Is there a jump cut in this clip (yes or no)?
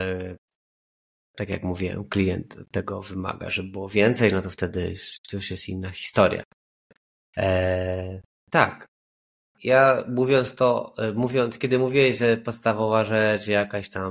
no